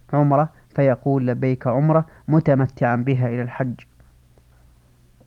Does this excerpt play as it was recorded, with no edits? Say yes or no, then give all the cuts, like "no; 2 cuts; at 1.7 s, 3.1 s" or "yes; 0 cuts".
yes; 0 cuts